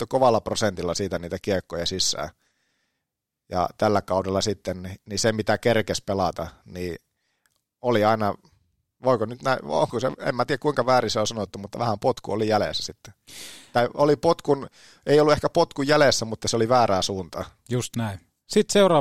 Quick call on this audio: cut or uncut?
uncut